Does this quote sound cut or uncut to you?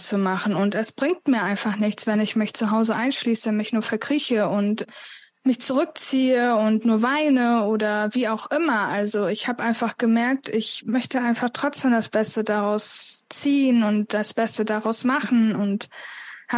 uncut